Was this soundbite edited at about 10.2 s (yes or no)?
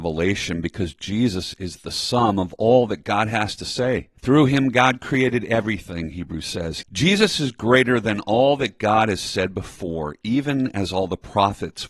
no